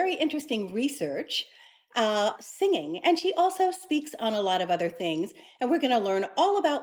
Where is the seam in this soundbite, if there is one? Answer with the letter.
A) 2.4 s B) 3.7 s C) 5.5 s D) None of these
A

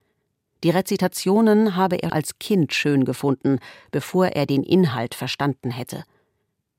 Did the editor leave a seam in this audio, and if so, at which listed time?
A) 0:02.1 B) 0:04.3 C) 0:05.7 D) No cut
A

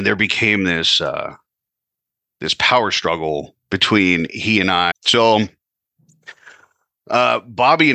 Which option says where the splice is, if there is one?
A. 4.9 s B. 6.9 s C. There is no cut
A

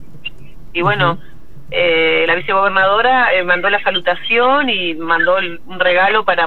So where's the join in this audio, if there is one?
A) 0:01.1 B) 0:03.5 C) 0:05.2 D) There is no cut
D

